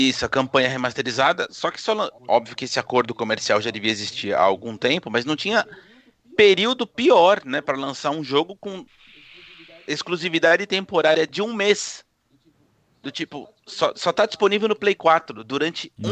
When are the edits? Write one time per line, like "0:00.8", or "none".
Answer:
0:02.2